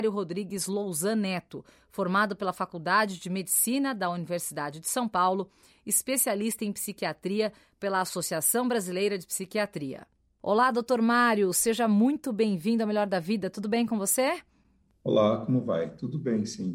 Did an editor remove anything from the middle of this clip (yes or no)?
no